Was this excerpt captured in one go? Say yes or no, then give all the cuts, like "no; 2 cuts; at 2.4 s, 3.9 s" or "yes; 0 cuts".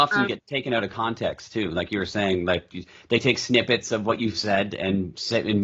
yes; 0 cuts